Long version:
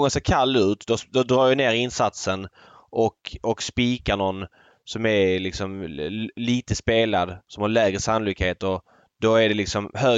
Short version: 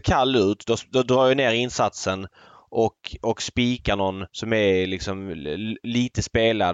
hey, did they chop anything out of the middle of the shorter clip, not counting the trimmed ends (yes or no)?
yes